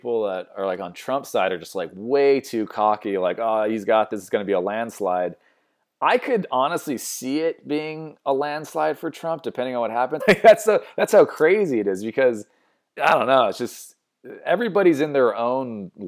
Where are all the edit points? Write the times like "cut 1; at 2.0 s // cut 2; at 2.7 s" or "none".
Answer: cut 1; at 10.2 s // cut 2; at 13.0 s